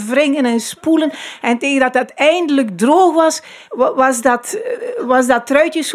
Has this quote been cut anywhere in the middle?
no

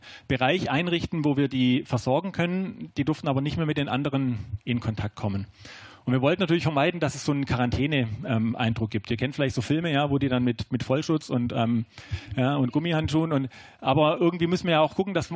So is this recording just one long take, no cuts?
yes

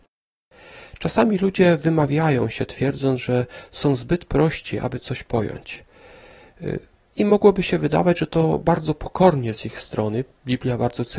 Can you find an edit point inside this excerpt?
no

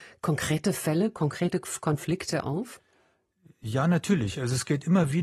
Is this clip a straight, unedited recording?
yes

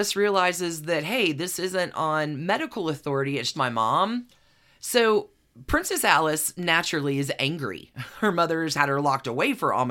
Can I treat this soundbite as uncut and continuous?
no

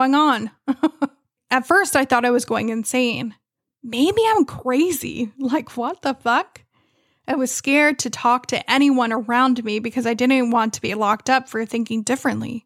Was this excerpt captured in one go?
yes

